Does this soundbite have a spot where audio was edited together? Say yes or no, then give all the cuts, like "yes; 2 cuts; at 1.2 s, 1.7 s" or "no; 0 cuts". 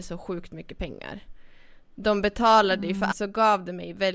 yes; 1 cut; at 3.1 s